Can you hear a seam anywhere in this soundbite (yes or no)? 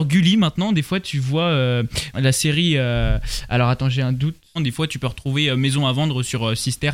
yes